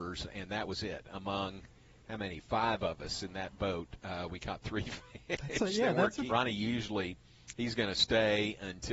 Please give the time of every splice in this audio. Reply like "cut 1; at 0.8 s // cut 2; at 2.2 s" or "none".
cut 1; at 6.3 s